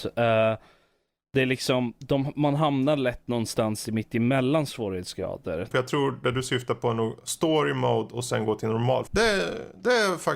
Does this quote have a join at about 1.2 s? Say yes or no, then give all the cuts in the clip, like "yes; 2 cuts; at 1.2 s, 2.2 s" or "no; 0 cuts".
no; 2 cuts; at 5.7 s, 9.1 s